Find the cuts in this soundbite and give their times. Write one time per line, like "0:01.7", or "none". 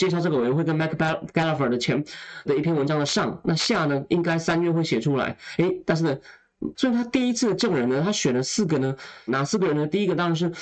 0:02.5
0:06.7
0:09.3